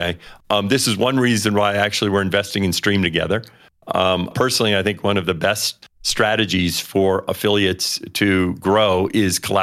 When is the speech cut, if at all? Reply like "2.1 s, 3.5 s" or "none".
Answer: 4.3 s, 5.8 s